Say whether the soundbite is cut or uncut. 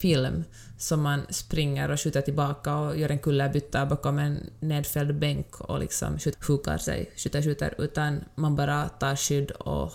cut